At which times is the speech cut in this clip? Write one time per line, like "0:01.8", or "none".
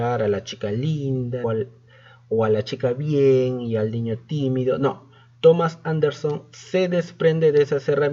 0:01.4

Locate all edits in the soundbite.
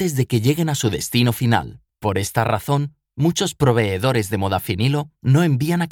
none

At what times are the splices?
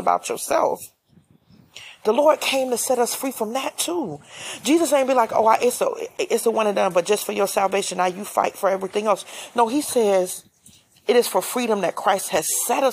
none

